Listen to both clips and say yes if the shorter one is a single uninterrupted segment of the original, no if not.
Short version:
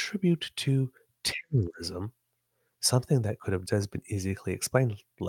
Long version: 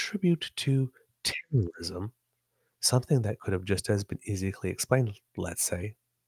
no